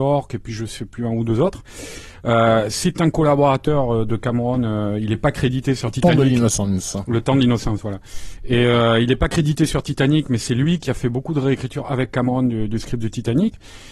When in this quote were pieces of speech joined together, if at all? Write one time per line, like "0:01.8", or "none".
none